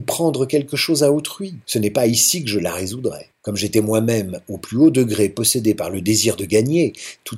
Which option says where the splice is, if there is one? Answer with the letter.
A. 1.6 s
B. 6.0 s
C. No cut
A